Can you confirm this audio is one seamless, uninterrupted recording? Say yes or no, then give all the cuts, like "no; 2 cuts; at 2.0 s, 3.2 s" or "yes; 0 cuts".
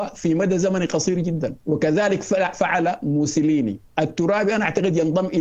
no; 2 cuts; at 1.6 s, 3.9 s